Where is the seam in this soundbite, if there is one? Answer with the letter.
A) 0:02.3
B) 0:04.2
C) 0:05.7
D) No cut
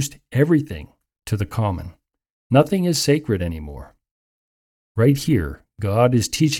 D